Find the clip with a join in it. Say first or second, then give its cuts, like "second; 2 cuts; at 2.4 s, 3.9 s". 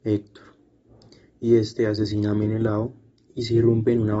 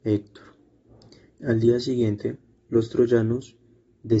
second; 1 cut; at 1.3 s